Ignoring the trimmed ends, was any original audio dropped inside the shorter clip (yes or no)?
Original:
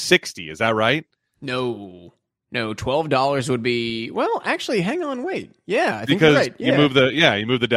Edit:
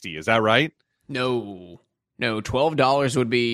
no